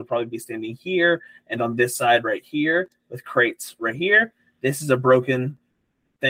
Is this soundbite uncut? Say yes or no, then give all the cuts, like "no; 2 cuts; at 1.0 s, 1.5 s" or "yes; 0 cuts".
yes; 0 cuts